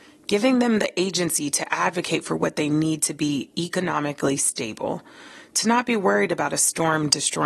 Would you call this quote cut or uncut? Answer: uncut